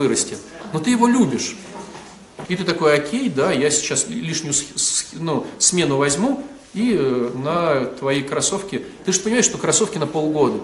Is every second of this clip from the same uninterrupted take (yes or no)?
no